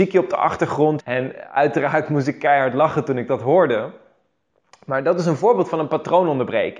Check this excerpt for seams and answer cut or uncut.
cut